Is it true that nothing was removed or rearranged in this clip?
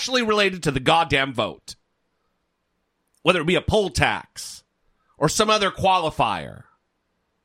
yes; 0 cuts

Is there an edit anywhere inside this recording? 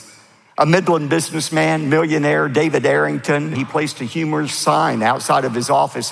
yes; 1 cut; at 3.5 s

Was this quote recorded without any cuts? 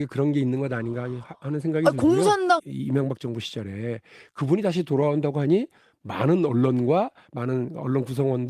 no; 1 cut; at 2.6 s

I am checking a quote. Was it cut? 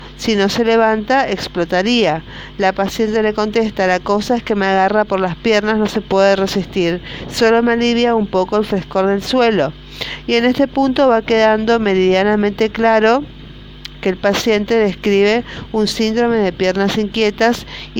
no; 0 cuts

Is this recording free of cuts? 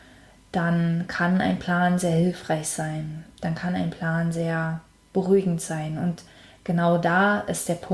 yes; 0 cuts

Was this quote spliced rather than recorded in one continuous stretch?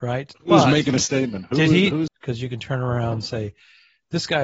yes; 1 cut; at 2.1 s

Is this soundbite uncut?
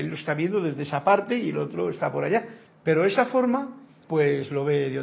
no; 2 cuts; at 2.7 s, 4.0 s

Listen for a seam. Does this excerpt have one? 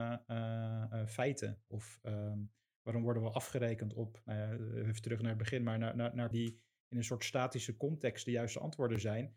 yes; 1 cut; at 6.3 s

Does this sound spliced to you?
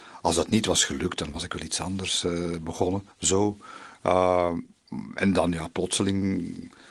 yes; 1 cut; at 3.1 s

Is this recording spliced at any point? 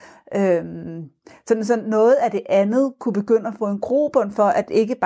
no; 0 cuts

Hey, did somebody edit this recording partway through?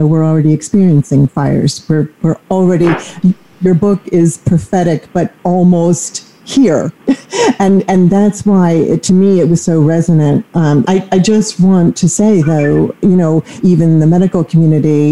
yes; 2 cuts; at 10.8 s, 13.6 s

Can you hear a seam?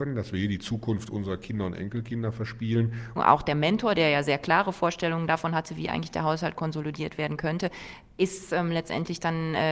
yes; 1 cut; at 3.2 s

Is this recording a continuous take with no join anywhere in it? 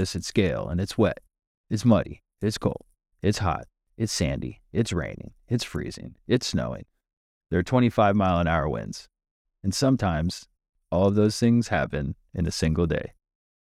yes; 0 cuts

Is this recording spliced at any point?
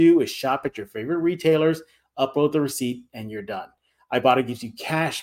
no; 0 cuts

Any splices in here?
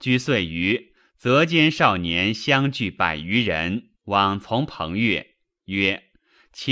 no; 0 cuts

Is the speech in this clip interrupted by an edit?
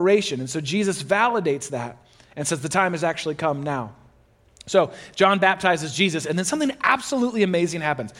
no; 0 cuts

